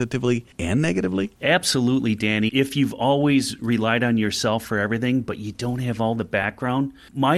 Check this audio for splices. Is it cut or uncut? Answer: cut